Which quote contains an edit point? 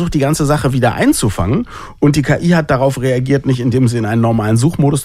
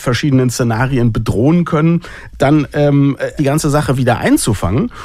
second; 2 cuts; at 2.3 s, 3.4 s

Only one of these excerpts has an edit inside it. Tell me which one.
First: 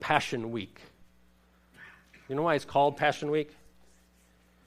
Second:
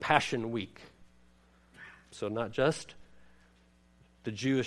second; 1 cut; at 2.1 s

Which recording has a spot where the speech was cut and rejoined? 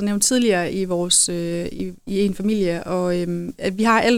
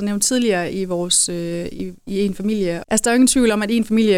second; 1 cut; at 2.8 s

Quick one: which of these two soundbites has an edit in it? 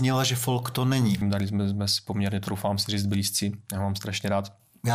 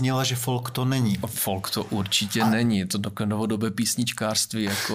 first; 1 cut; at 1.2 s

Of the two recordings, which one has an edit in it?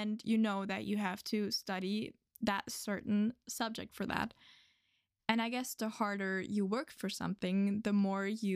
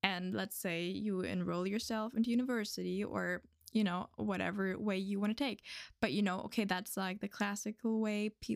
first; 1 cut; at 5.2 s

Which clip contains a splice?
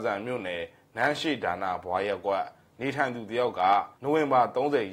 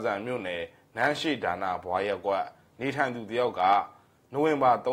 first; 1 cut; at 3.9 s

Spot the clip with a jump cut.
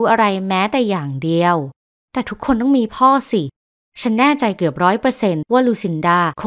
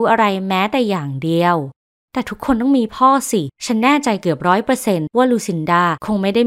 second; 1 cut; at 3.5 s

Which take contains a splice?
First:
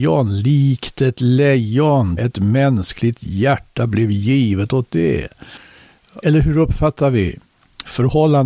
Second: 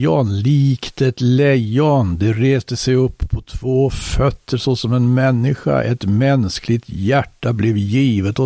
first; 2 cuts; at 2.2 s, 6.2 s

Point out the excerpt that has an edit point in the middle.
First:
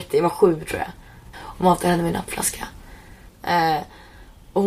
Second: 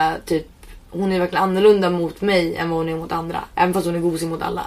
first; 2 cuts; at 1.3 s, 3.3 s

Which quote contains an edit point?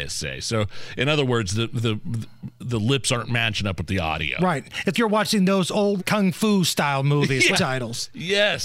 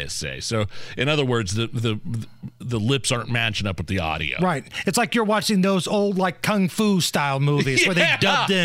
first; 3 cuts; at 4.9 s, 6.0 s, 7.5 s

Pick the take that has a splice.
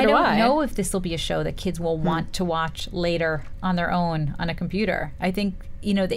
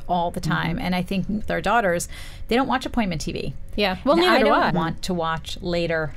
second; 2 cuts; at 1.4 s, 4.7 s

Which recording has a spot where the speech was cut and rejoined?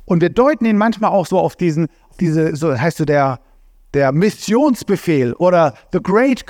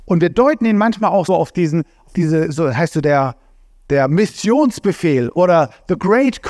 second; 1 cut; at 1.3 s

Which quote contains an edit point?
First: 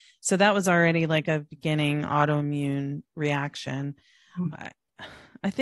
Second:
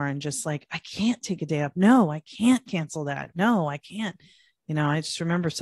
first; 1 cut; at 4.5 s

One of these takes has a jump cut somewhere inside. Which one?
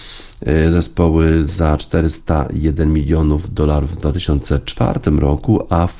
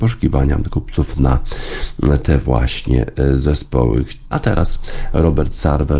second; 1 cut; at 4.3 s

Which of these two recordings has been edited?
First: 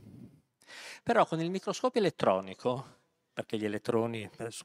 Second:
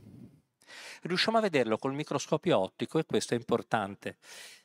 first; 2 cuts; at 1.0 s, 3.3 s

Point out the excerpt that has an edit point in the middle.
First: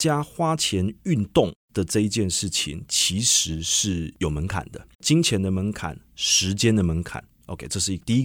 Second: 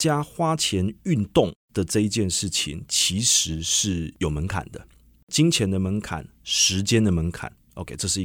first; 1 cut; at 4.9 s

